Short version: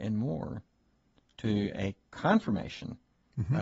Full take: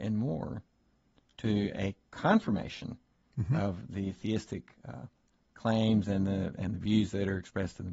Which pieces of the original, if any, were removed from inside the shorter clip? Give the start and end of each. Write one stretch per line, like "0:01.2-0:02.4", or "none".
none